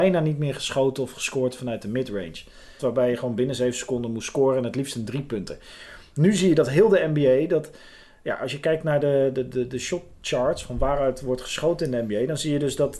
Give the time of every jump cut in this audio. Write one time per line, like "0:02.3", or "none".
0:02.8